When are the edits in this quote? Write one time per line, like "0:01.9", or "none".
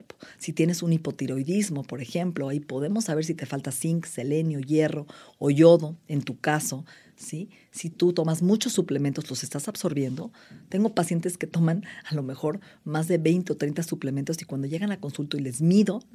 none